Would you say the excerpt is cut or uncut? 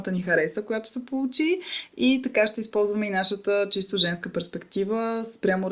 uncut